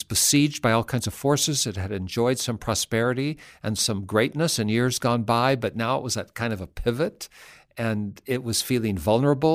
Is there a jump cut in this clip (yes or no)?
no